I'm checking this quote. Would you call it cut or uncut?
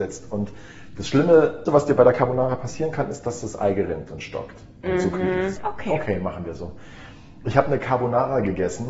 cut